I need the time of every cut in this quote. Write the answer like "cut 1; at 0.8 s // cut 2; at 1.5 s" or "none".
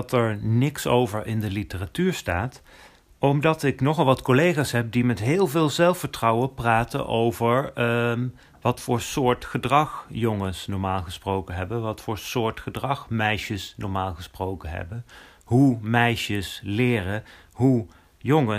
none